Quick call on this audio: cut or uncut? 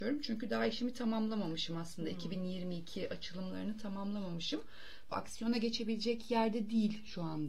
cut